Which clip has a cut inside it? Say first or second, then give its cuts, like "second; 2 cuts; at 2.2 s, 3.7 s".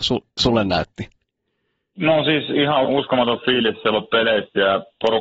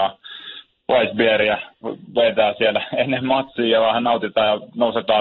first; 1 cut; at 2.8 s